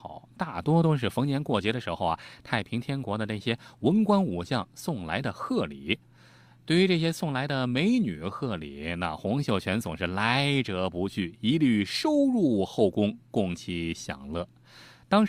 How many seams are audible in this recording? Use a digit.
0